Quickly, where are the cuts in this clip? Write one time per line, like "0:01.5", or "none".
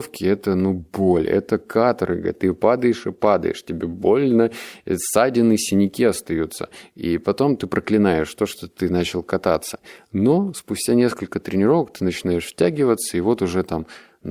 none